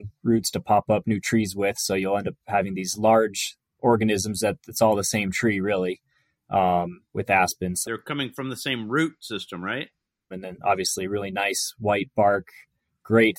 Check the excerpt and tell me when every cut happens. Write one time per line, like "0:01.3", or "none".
0:07.8
0:10.3